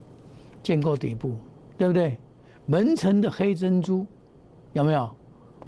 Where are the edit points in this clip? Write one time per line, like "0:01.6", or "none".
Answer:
none